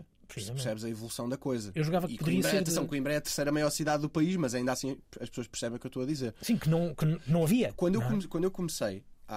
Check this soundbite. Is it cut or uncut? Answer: uncut